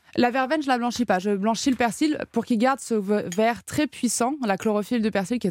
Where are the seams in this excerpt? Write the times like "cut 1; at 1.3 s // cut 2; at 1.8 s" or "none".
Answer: none